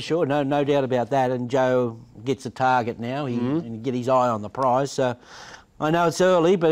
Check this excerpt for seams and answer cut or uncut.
uncut